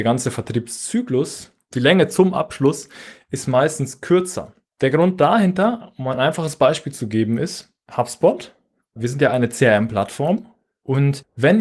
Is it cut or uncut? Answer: uncut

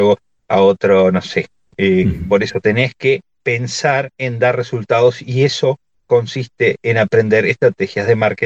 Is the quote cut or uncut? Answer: cut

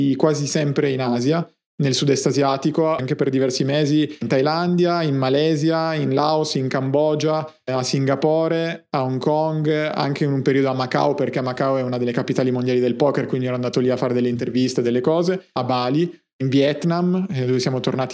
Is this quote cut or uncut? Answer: cut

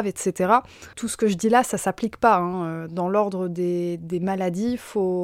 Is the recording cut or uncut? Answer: cut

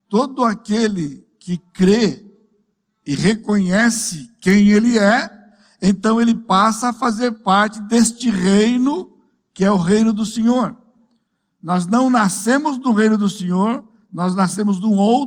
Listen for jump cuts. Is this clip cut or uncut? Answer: uncut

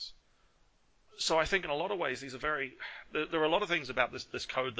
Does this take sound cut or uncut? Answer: uncut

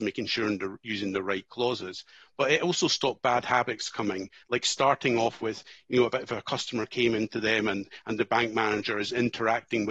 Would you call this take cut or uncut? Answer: uncut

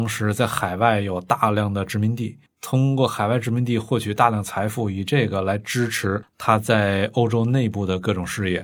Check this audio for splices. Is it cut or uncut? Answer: uncut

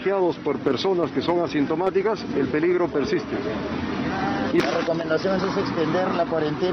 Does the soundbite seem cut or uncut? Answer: cut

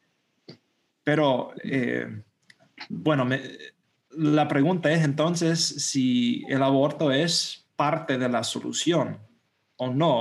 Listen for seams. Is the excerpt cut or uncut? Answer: uncut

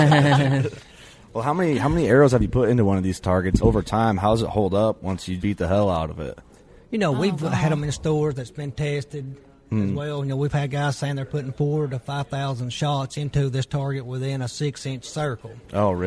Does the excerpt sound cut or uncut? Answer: cut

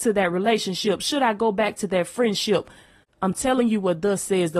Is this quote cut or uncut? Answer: uncut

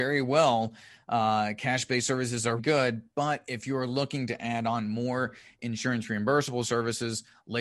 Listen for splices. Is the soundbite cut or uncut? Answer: cut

